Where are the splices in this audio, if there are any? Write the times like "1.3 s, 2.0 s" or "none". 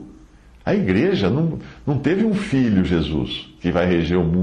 none